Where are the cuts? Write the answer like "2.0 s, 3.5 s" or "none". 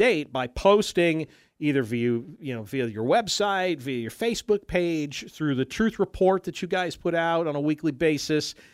none